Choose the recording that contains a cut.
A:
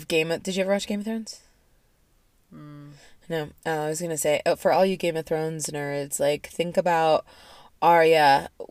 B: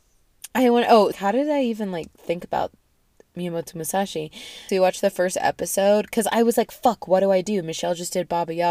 B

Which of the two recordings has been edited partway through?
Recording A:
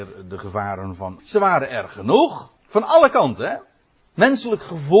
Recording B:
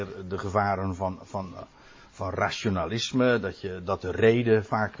A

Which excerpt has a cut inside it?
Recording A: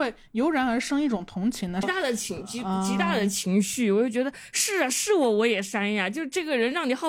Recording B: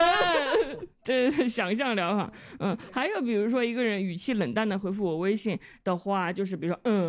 A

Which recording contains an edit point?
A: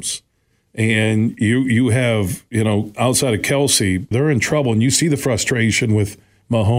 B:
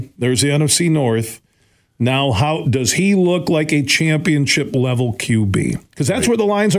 A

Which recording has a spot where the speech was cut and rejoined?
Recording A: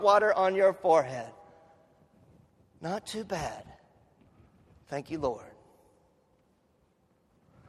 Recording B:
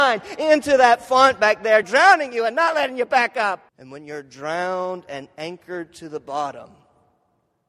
B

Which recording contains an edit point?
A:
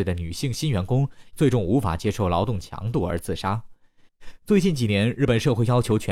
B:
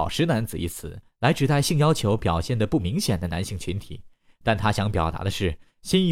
A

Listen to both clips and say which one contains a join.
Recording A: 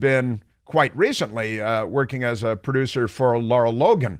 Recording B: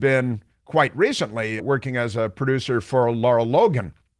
B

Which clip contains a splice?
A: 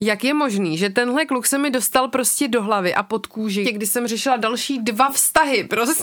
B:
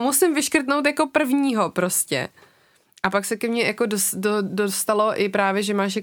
A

